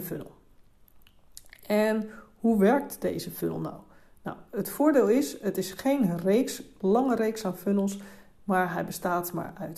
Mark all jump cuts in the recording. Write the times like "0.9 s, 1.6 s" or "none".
none